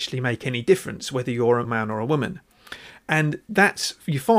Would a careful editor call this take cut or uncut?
cut